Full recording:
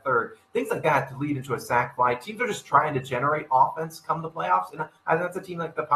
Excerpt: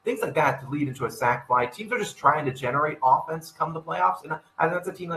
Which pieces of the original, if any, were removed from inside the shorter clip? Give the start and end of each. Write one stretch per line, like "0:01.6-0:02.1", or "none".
none

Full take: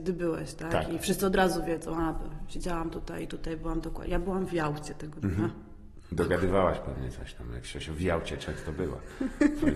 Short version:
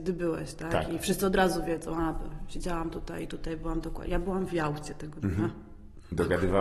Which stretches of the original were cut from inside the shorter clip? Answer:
none

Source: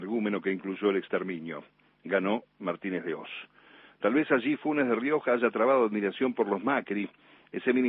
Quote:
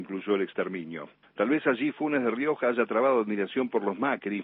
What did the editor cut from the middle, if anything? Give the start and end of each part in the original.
0:01.8-0:03.9

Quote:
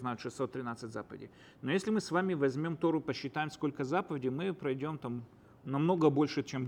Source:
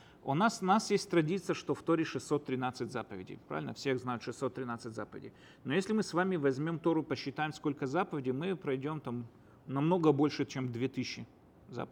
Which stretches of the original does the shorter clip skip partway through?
none

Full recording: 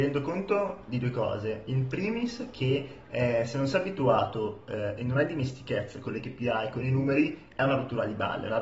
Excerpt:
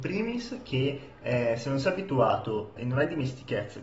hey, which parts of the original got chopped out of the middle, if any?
0:04.6-0:05.0

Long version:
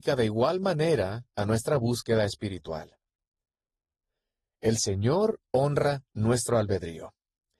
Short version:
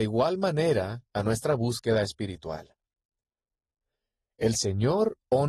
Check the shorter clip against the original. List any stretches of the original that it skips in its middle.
none

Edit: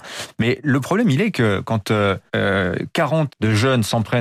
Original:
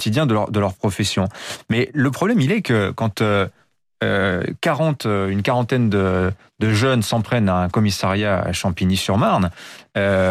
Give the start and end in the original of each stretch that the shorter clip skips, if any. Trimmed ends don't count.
0:03.6-0:03.9
0:05.0-0:06.5

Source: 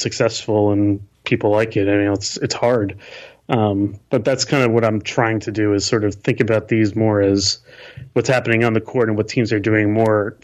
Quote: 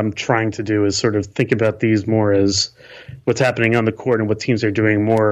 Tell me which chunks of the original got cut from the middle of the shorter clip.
none

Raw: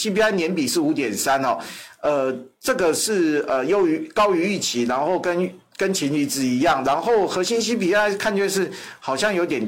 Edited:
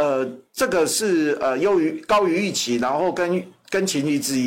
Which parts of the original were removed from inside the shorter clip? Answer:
none

